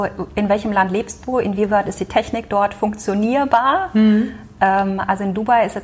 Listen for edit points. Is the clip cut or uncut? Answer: uncut